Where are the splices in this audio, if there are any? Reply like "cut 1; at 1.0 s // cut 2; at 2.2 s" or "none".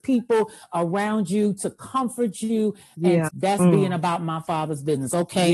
cut 1; at 3.3 s